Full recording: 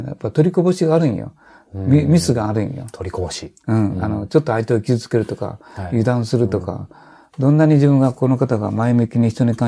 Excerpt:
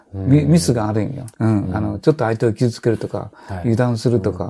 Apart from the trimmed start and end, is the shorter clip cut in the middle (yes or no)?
yes